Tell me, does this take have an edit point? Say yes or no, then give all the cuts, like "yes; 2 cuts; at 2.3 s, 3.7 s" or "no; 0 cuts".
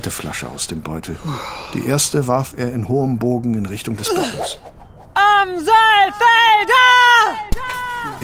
no; 0 cuts